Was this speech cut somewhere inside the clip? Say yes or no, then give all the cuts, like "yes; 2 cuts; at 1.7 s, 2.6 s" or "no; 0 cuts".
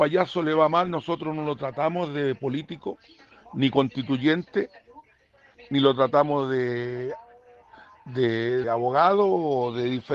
yes; 1 cut; at 8.6 s